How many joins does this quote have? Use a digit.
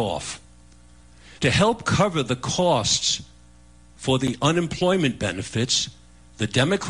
1